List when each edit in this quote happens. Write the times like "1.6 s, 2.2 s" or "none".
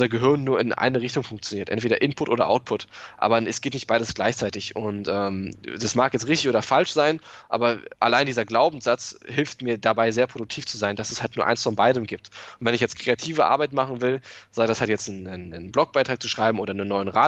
none